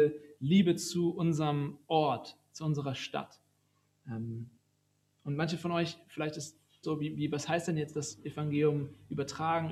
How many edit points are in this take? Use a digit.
1